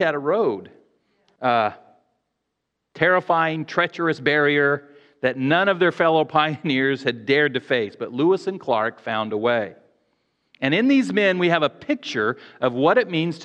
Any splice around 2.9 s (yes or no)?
no